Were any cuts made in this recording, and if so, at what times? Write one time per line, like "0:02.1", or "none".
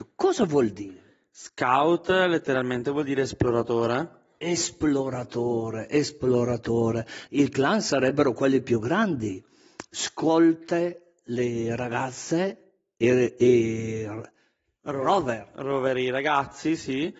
0:07.3